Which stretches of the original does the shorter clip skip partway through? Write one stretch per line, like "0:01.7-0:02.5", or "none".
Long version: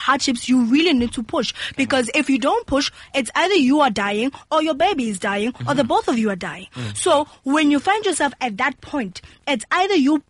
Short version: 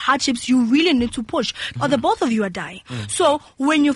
0:01.8-0:05.6